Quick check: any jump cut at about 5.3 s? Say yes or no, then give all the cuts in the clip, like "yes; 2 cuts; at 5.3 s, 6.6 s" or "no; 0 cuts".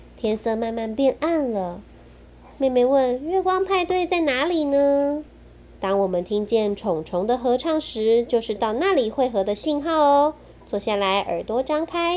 yes; 1 cut; at 5.3 s